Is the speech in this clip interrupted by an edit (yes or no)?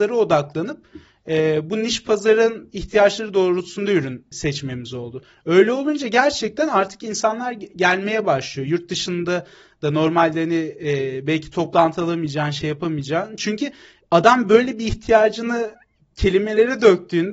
no